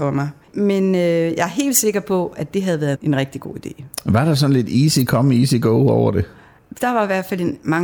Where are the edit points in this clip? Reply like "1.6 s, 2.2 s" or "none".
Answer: 3.0 s